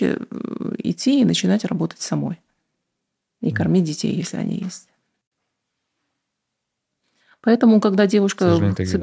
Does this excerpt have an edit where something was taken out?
no; 0 cuts

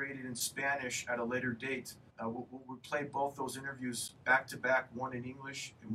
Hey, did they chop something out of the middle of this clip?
yes; 1 cut; at 2.1 s

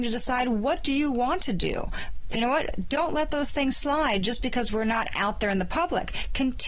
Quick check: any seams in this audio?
yes; 1 cut; at 2.3 s

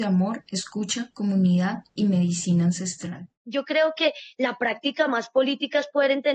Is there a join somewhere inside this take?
no; 0 cuts

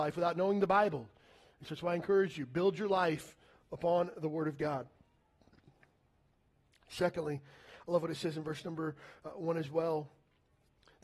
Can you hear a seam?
no; 0 cuts

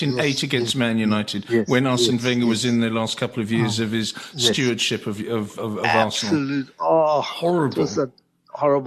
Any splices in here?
no; 0 cuts

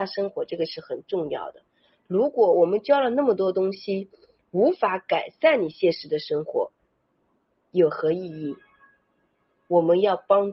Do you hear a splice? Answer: no; 0 cuts

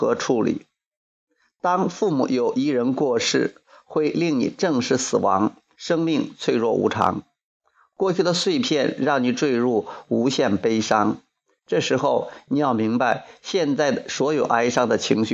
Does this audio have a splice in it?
yes; 1 cut; at 5.7 s

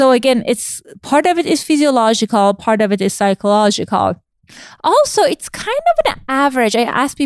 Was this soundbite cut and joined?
no; 0 cuts

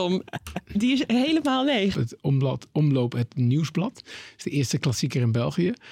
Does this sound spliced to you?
yes; 1 cut; at 1.9 s

